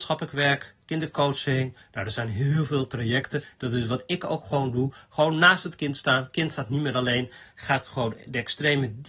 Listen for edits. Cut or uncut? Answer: uncut